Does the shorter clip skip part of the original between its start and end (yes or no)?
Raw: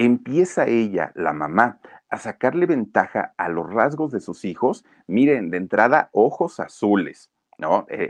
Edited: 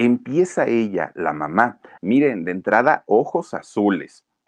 yes